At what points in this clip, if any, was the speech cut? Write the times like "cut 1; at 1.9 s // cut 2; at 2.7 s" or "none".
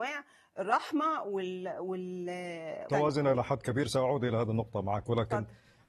cut 1; at 2.9 s